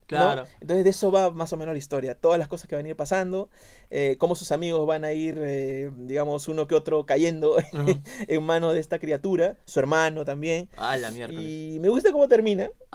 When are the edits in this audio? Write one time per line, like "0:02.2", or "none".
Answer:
none